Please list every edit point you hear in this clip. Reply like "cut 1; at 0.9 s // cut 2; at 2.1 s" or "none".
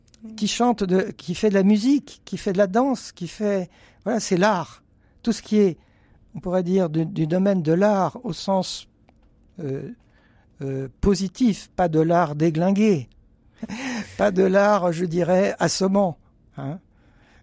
cut 1; at 11.7 s // cut 2; at 13.6 s